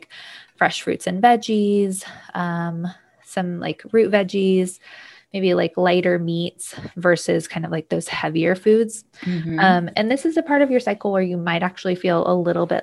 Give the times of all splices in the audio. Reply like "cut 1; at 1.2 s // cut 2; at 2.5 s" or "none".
none